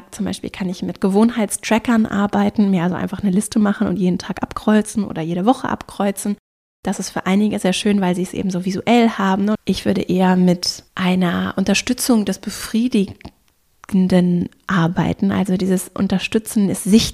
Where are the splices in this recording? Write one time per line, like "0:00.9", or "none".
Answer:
0:09.6
0:10.9